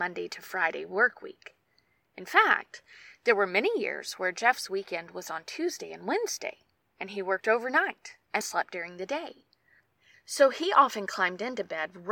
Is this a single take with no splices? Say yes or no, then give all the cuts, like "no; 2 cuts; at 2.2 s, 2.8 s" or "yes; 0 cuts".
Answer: no; 1 cut; at 8.4 s